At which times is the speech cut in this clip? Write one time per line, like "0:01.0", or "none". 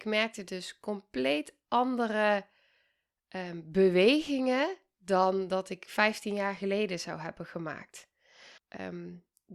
0:08.6